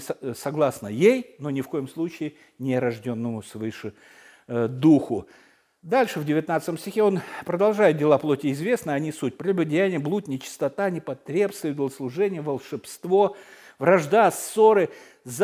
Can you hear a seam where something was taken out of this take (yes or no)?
no